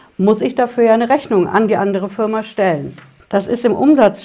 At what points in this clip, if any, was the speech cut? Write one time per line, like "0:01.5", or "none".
0:03.2